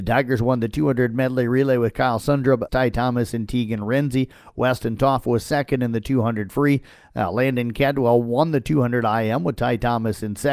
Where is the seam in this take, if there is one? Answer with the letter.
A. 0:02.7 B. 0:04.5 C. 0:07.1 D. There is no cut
A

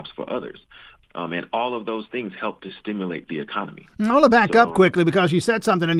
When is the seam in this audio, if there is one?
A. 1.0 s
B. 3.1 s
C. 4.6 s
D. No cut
A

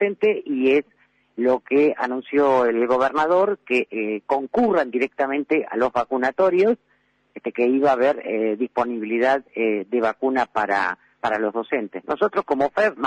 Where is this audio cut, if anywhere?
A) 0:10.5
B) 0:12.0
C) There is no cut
B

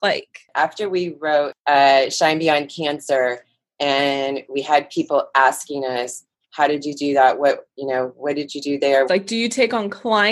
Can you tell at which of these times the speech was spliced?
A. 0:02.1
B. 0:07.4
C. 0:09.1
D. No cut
C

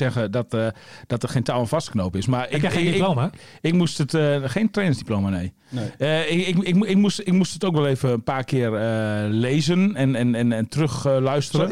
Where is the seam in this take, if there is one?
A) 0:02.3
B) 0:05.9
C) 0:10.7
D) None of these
C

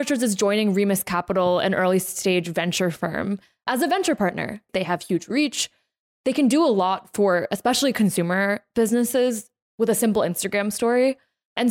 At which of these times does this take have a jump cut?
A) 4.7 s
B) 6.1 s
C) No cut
A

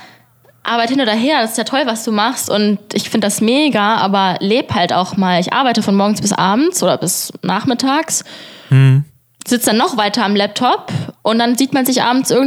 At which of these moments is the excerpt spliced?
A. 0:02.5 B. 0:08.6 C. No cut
C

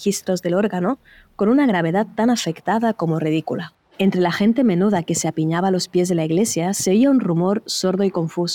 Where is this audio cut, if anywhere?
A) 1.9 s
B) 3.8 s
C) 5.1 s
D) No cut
B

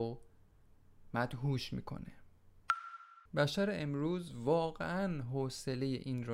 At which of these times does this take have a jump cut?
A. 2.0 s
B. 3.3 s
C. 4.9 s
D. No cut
B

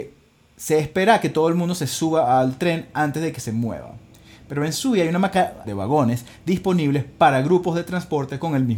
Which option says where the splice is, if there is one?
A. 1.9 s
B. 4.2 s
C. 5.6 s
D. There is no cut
C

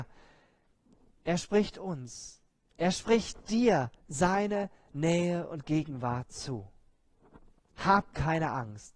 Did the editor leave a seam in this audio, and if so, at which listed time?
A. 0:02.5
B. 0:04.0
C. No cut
B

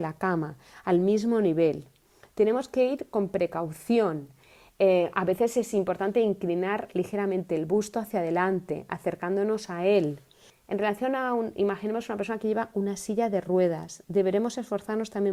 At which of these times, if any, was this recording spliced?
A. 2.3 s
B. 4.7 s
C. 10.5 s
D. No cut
C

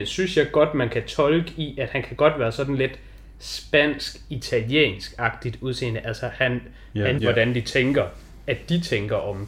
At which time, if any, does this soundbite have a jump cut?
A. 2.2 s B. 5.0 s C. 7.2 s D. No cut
C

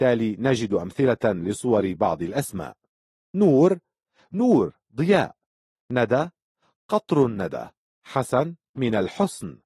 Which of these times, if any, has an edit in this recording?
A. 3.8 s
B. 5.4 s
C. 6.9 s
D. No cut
D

